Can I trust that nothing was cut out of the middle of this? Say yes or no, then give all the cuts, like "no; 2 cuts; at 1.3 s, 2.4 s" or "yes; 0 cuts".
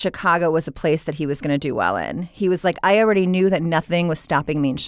yes; 0 cuts